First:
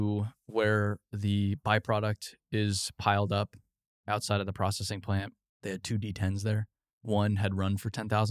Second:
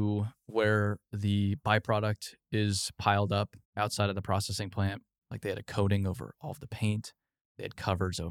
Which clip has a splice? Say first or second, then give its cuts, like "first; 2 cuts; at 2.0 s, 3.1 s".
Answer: second; 2 cuts; at 3.6 s, 5.2 s